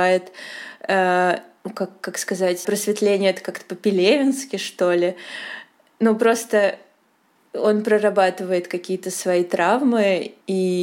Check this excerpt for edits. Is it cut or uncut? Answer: cut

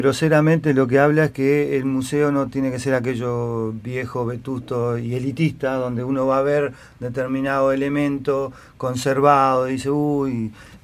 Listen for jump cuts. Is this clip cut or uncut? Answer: uncut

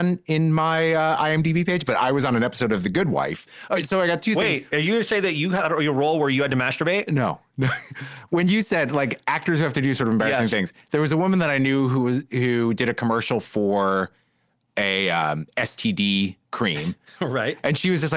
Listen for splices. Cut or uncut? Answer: uncut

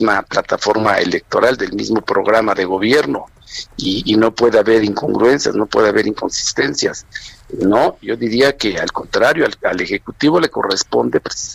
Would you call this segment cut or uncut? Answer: uncut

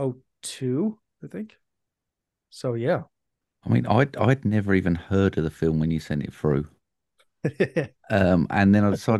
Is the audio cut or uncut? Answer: uncut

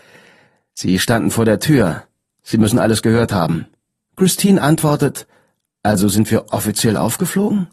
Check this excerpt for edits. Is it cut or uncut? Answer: uncut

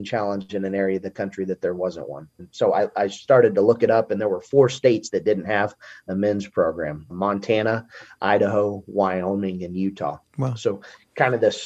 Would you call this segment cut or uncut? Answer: cut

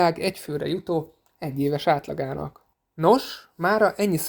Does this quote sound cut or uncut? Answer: uncut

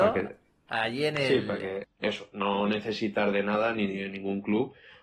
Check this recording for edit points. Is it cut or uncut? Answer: cut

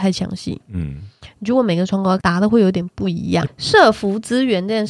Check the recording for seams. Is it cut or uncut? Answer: cut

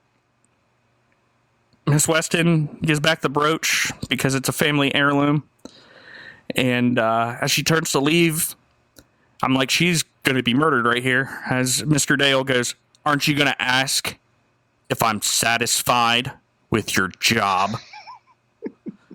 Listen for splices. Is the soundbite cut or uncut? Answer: uncut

